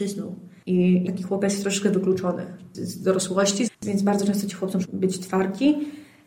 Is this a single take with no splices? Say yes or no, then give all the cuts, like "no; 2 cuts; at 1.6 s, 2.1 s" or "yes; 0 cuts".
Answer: no; 3 cuts; at 1.1 s, 3.7 s, 4.8 s